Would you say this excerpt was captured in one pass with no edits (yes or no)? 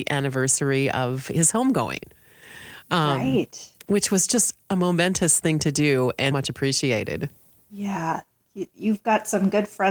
no